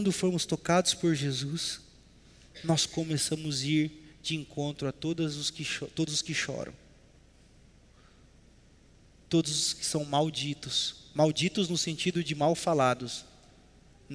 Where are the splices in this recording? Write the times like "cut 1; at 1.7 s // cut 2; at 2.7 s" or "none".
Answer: none